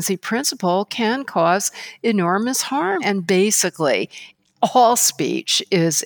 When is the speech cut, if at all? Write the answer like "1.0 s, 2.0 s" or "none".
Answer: 3.0 s